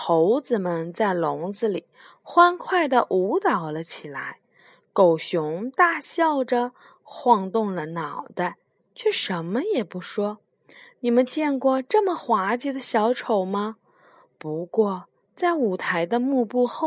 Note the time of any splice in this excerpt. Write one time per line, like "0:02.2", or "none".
none